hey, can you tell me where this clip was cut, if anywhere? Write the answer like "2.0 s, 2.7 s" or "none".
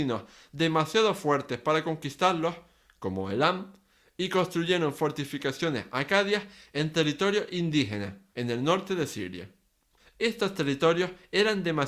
8.3 s, 10.0 s